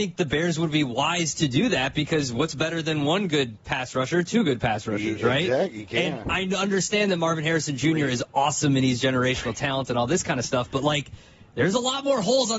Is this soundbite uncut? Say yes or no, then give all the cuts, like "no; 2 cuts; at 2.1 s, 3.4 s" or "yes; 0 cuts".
yes; 0 cuts